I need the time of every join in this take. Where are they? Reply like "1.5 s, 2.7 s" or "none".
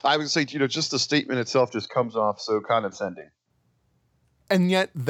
none